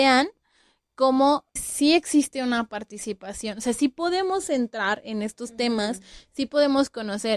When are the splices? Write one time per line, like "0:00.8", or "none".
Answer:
0:01.6